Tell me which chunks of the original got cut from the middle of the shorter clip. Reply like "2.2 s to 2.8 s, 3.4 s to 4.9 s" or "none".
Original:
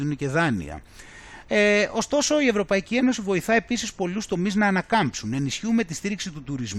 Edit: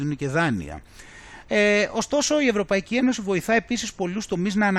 none